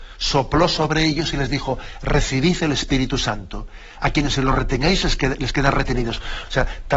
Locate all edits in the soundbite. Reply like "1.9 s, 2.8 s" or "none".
4.0 s